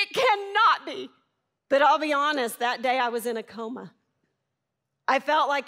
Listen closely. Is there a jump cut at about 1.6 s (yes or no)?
yes